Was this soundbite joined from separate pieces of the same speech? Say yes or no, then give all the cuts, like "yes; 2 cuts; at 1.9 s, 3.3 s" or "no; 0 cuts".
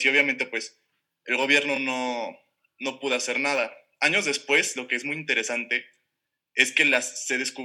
no; 0 cuts